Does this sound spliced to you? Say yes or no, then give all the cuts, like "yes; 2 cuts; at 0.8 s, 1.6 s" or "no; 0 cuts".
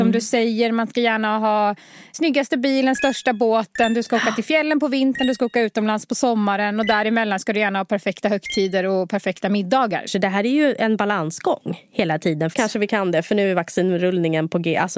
yes; 3 cuts; at 2.1 s, 10.1 s, 12.5 s